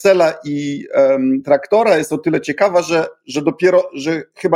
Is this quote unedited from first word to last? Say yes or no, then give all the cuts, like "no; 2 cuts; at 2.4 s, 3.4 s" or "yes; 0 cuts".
yes; 0 cuts